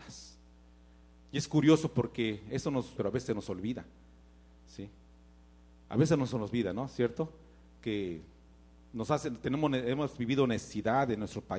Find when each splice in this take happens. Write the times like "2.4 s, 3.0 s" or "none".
3.0 s